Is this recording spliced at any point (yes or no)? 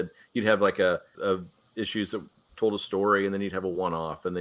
yes